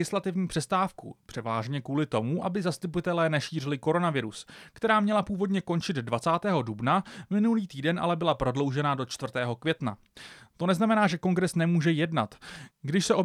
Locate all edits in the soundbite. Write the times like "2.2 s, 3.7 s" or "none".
none